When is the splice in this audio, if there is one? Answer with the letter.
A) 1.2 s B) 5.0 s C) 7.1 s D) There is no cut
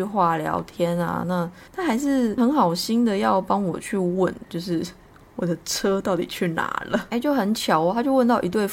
C